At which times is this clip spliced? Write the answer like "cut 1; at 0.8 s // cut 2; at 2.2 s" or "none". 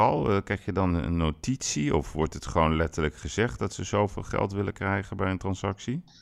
cut 1; at 0.9 s